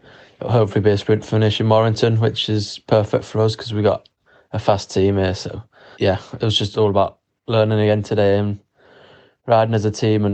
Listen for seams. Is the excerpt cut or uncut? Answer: cut